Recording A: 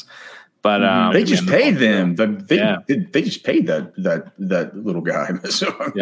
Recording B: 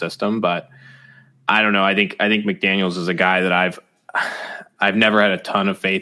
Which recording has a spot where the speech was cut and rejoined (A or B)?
A